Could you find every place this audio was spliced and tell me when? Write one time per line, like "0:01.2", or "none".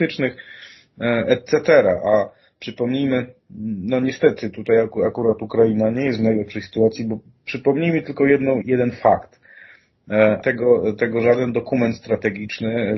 0:08.6
0:10.4